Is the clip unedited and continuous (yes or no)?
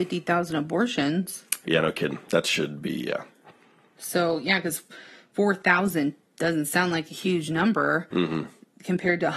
yes